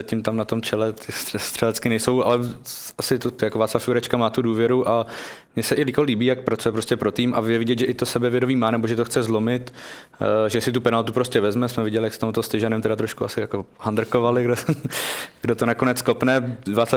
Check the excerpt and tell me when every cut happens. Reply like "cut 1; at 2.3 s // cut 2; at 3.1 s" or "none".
cut 1; at 3.4 s